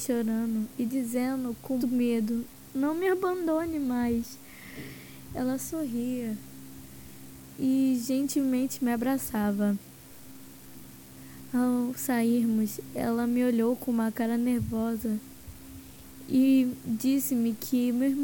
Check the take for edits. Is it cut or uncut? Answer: cut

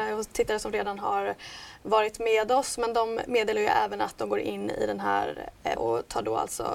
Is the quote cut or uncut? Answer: cut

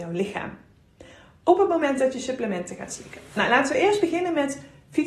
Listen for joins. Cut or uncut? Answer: uncut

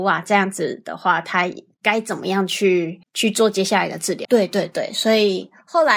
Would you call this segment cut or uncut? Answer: cut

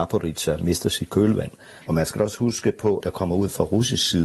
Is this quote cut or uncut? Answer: cut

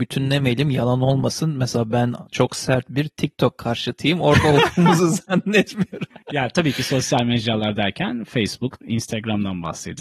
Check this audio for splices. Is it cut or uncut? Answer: cut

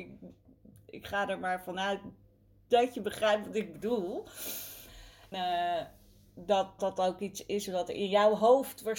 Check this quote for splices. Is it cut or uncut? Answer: cut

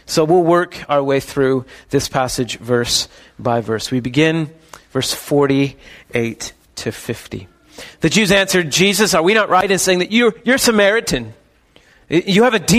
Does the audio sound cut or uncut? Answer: uncut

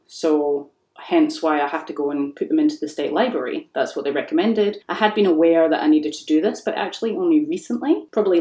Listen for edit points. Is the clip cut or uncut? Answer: uncut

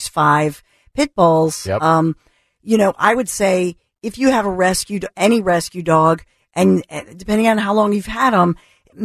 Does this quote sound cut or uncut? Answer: uncut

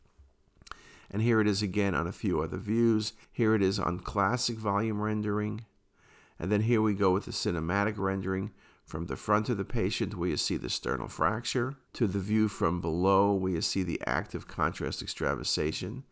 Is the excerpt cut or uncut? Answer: cut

